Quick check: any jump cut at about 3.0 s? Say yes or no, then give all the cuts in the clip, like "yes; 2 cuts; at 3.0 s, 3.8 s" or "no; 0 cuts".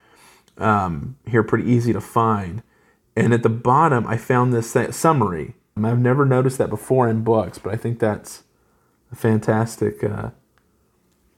no; 1 cut; at 5.8 s